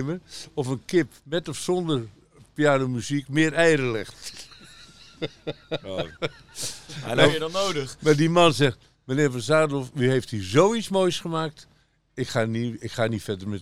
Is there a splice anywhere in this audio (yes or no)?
yes